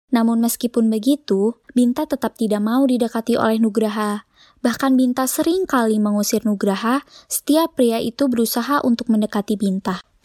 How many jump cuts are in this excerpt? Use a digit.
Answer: 1